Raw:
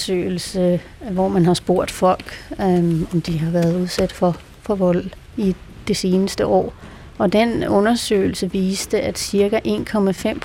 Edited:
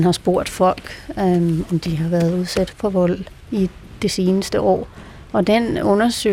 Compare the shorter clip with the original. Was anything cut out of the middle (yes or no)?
yes